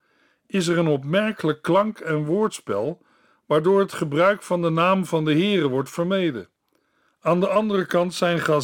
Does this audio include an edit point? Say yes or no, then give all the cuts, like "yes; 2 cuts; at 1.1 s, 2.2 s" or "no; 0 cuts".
no; 0 cuts